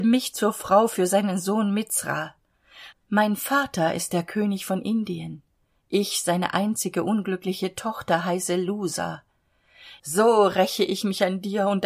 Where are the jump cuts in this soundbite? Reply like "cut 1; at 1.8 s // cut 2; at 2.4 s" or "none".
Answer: cut 1; at 2.9 s // cut 2; at 10.0 s